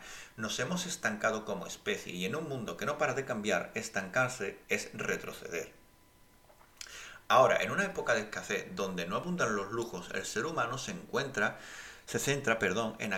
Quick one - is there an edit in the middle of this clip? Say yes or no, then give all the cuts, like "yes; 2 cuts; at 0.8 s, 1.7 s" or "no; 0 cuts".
no; 0 cuts